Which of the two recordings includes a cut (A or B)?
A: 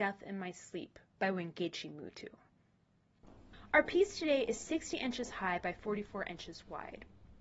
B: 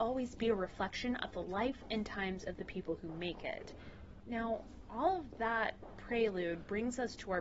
B